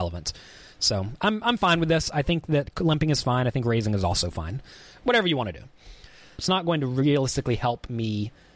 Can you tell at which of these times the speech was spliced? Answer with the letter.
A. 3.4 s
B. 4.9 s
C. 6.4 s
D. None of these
C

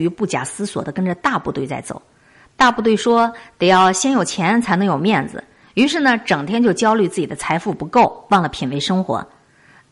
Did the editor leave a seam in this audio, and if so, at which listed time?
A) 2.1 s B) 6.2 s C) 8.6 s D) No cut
D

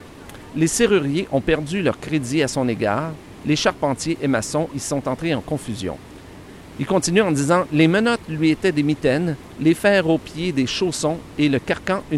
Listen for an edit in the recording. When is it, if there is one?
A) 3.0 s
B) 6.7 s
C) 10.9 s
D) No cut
B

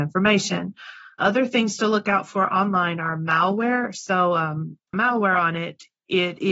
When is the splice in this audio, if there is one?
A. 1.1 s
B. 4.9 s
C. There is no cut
B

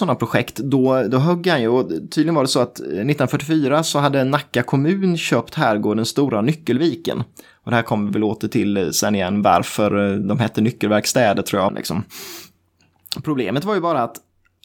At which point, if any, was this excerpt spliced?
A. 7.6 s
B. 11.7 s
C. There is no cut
B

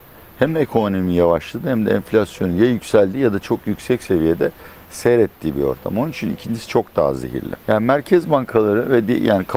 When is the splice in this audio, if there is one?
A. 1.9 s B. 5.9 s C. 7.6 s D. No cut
C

